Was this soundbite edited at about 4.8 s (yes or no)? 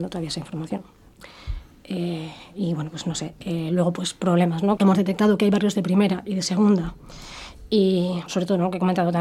yes